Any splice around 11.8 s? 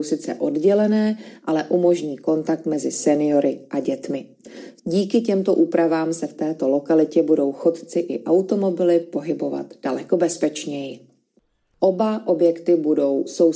yes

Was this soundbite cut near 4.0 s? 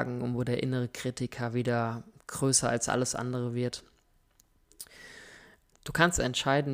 no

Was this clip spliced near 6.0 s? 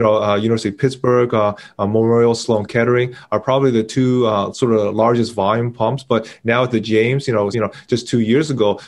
no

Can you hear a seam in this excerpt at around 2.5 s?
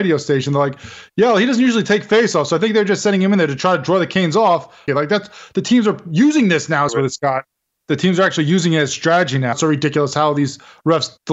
no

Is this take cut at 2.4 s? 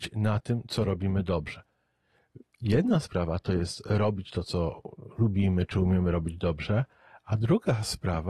yes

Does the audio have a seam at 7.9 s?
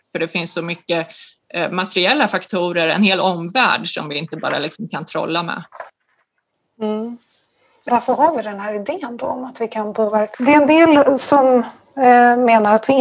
yes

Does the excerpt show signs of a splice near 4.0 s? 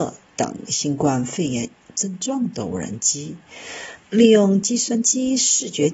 yes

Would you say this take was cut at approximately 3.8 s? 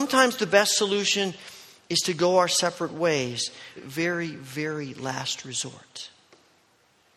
yes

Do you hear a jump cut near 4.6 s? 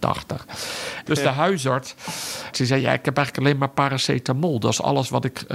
no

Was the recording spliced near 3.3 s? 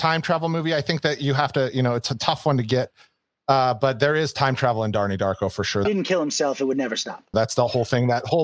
no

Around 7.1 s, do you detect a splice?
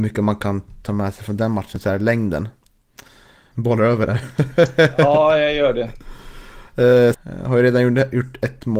yes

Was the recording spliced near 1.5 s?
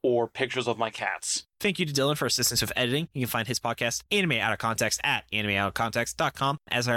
yes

